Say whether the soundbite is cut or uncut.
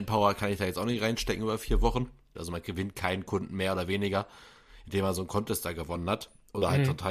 cut